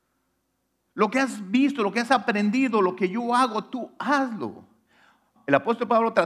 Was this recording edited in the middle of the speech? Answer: yes; 1 cut; at 5.4 s

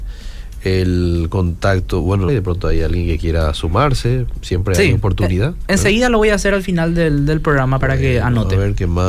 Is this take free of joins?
no; 2 cuts; at 2.3 s, 7.8 s

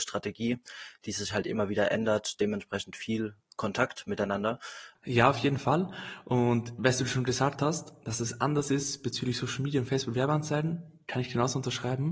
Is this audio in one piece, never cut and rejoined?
no; 1 cut; at 4.9 s

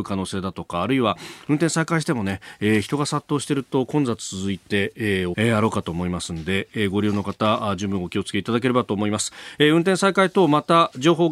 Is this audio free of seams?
no; 1 cut; at 5.3 s

